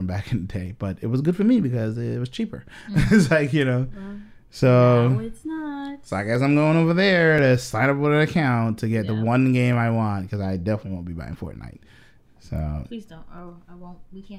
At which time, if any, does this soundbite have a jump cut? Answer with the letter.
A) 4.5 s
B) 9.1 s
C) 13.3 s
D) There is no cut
D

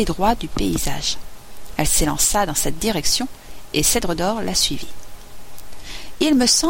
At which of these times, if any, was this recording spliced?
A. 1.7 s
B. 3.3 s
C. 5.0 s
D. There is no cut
D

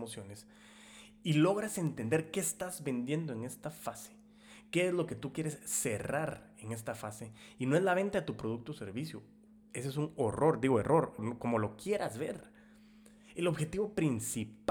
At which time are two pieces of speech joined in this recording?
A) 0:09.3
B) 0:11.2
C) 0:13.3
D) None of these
B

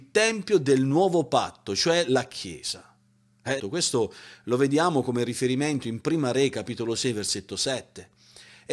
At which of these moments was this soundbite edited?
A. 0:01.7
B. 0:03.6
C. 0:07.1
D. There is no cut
B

